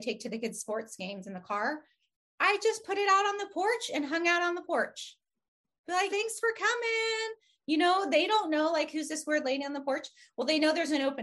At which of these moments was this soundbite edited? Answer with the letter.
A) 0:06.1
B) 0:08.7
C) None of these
A